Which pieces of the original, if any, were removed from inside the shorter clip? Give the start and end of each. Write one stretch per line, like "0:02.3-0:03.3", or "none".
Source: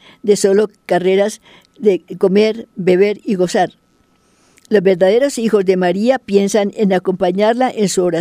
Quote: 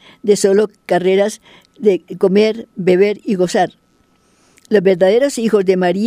none